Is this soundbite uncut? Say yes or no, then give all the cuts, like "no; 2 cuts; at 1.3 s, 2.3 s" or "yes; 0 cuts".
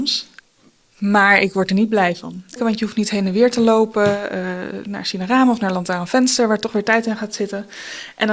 no; 1 cut; at 2.6 s